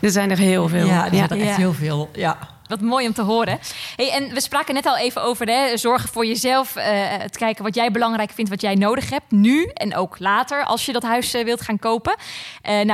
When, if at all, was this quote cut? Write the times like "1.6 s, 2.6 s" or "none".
2.7 s